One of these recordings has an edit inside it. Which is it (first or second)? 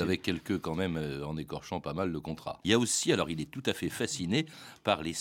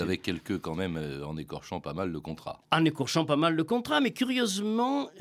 first